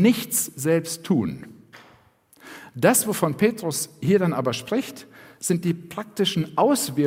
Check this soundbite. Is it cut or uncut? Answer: uncut